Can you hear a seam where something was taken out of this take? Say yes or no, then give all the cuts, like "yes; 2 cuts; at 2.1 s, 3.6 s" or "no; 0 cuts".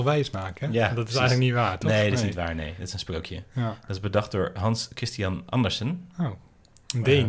yes; 1 cut; at 2.8 s